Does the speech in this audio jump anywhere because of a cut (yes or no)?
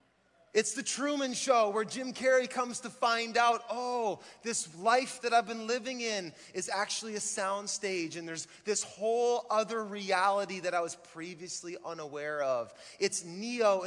no